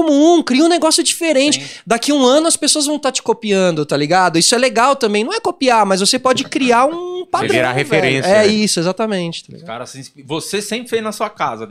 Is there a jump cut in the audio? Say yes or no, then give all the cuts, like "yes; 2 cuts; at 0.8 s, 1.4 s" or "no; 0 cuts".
no; 0 cuts